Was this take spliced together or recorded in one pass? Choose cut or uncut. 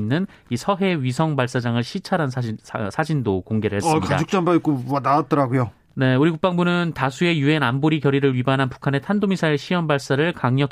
uncut